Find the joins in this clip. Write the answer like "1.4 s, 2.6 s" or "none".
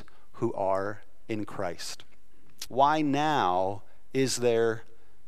2.7 s